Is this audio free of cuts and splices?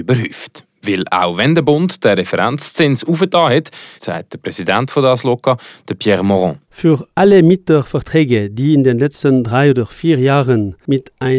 no; 1 cut; at 4.0 s

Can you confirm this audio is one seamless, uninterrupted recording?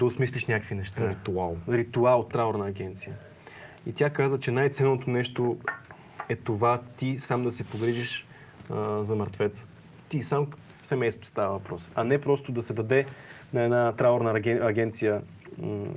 no; 1 cut; at 2.3 s

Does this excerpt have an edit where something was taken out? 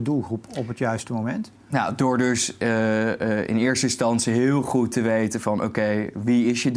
no; 0 cuts

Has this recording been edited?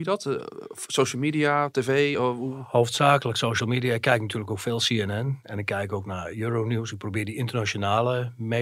no; 0 cuts

